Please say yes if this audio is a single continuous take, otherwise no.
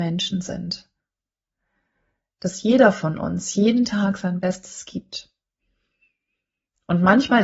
yes